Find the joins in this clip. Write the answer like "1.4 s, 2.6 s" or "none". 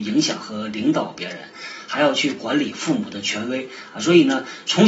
none